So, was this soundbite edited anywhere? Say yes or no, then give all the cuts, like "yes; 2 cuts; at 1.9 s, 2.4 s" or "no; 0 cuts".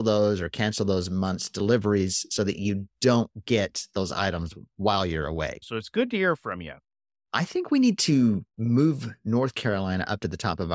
yes; 1 cut; at 5.6 s